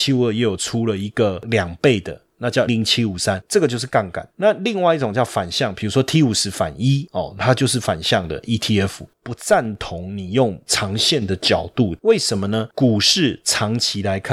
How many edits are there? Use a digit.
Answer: 3